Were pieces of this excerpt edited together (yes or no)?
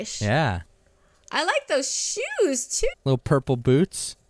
yes